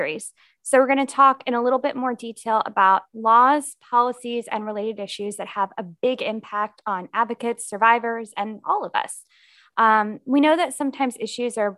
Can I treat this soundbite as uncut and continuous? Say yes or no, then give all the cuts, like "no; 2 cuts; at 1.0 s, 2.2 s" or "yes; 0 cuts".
yes; 0 cuts